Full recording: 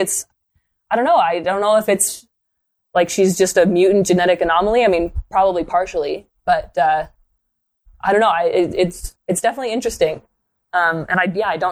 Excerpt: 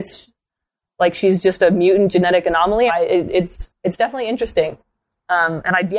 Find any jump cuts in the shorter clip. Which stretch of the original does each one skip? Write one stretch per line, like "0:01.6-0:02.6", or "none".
0:04.8-0:08.3